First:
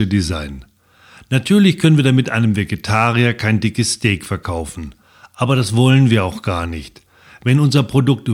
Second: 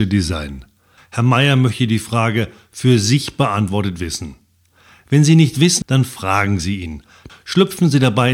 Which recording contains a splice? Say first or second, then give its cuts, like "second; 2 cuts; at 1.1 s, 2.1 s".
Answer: second; 3 cuts; at 1.0 s, 5.8 s, 7.3 s